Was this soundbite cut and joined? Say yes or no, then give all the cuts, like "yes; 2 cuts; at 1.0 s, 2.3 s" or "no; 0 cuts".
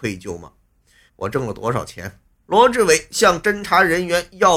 yes; 2 cuts; at 1.1 s, 2.4 s